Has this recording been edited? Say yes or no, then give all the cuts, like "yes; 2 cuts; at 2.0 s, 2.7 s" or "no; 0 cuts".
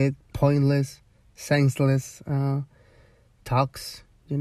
no; 0 cuts